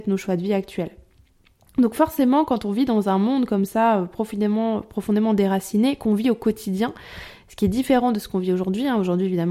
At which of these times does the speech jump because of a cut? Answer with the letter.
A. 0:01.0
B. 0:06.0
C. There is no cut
C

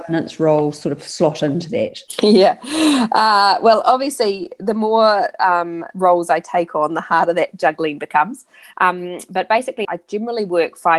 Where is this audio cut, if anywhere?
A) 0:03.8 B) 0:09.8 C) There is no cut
B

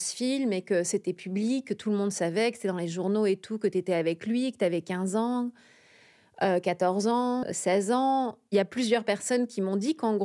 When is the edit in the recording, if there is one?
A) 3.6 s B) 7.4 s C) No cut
B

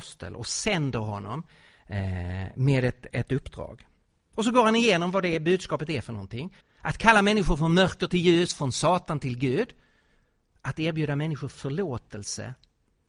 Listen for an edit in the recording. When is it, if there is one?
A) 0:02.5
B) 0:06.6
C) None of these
B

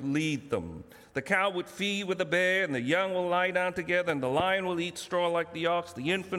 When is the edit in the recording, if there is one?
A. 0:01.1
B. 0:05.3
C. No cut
C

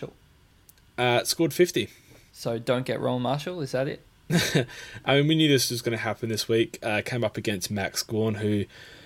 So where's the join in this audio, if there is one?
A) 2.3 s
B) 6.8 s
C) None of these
A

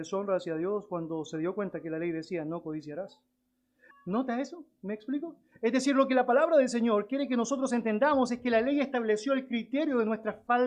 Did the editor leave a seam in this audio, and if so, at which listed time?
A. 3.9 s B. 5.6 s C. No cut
A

